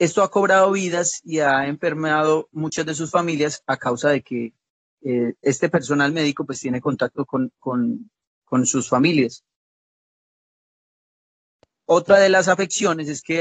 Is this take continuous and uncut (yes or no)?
yes